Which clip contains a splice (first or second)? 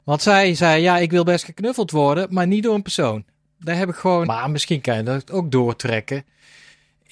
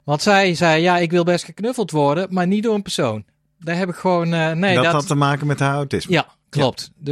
first